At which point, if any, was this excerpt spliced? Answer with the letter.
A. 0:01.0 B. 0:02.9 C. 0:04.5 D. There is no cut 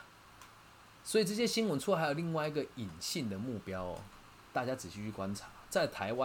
D